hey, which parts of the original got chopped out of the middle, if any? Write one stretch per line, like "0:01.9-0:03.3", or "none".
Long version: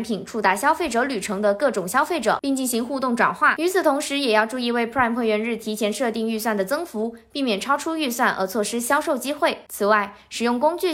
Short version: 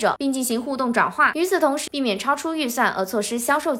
0:04.1-0:07.3